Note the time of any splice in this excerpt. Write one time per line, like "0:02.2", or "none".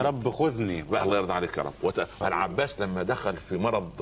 0:02.2

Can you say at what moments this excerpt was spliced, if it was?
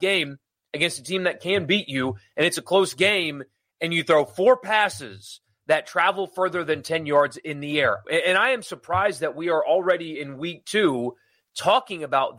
0:08.0

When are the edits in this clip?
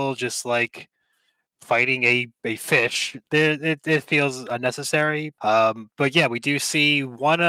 0:01.5
0:05.4

